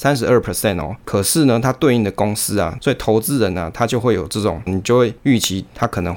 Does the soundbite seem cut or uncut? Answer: cut